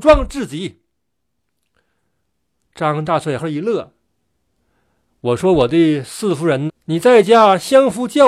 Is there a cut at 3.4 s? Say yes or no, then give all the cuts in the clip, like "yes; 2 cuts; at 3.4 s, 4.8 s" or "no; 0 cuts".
yes; 2 cuts; at 3.4 s, 6.7 s